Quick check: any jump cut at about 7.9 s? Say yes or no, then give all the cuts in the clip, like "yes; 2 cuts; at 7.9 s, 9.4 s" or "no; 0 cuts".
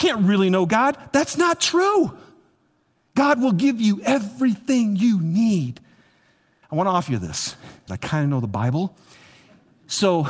yes; 2 cuts; at 6.6 s, 7.9 s